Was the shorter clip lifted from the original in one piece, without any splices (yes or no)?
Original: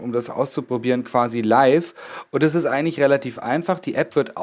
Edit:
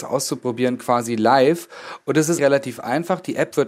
no